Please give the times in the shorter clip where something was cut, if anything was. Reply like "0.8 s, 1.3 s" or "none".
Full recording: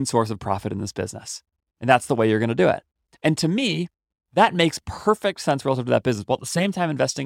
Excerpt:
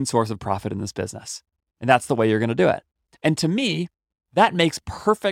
none